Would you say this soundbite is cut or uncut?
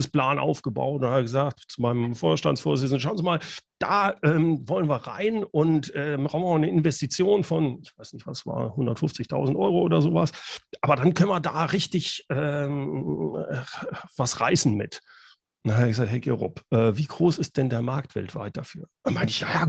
uncut